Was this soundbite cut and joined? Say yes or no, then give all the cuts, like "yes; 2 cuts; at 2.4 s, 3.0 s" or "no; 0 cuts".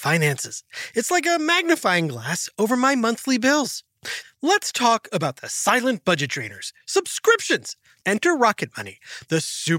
yes; 2 cuts; at 4.2 s, 8.0 s